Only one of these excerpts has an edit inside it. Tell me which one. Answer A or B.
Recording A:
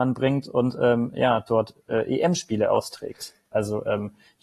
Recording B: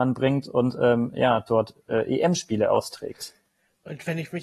A